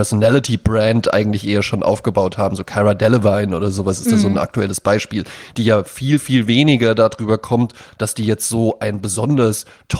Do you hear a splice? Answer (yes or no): no